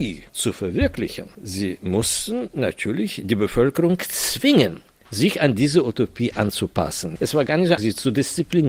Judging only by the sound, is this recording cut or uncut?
cut